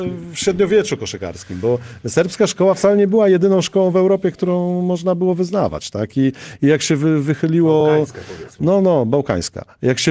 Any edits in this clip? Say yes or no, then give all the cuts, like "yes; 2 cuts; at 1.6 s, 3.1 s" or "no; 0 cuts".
no; 0 cuts